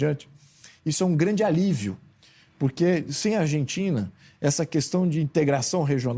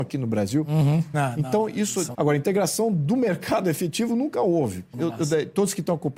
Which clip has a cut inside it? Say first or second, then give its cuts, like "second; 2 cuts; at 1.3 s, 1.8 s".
second; 3 cuts; at 1.1 s, 2.1 s, 4.9 s